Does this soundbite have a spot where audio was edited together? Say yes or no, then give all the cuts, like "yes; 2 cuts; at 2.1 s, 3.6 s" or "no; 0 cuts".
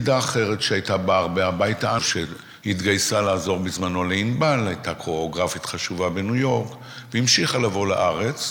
yes; 1 cut; at 2.0 s